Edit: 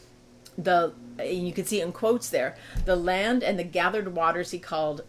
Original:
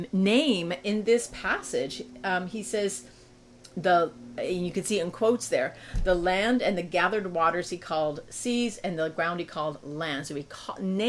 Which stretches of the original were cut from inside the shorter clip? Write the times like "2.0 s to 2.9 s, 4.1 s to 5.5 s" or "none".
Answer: none